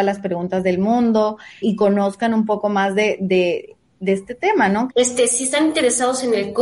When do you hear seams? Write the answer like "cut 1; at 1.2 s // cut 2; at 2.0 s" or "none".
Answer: cut 1; at 1.6 s // cut 2; at 4.9 s